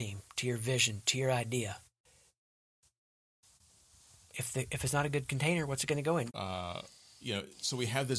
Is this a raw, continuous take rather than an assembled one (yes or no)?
no